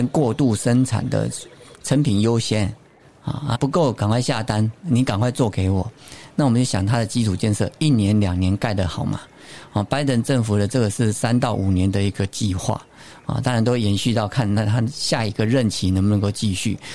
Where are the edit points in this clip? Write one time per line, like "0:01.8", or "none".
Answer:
0:01.8
0:03.6